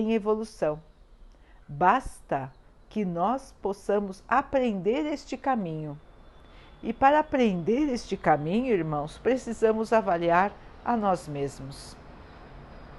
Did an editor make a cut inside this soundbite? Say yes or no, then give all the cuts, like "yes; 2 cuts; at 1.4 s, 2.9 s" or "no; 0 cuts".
no; 0 cuts